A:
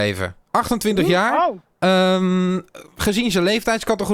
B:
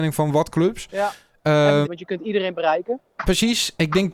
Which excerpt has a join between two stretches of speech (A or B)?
B